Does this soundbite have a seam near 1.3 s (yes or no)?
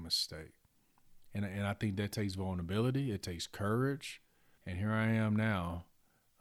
no